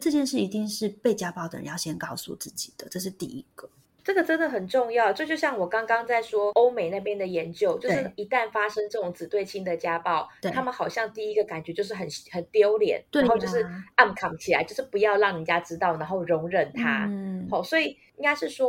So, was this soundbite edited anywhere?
no; 0 cuts

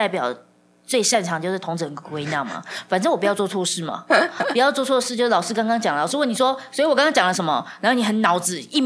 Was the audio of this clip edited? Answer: no; 0 cuts

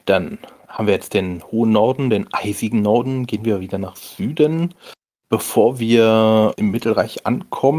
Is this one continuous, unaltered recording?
no; 1 cut; at 6.5 s

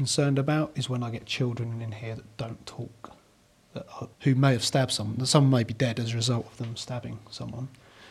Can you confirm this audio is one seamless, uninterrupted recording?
no; 1 cut; at 4.1 s

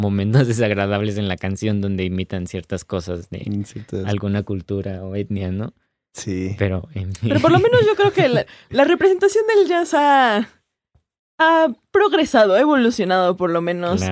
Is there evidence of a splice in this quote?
no; 0 cuts

